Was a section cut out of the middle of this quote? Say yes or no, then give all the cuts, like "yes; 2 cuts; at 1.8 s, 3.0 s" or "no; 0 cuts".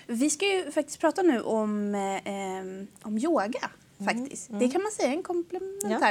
no; 0 cuts